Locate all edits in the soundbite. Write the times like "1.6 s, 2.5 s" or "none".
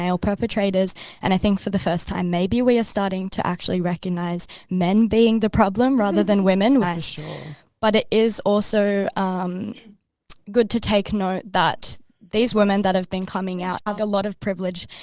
6.8 s, 14.0 s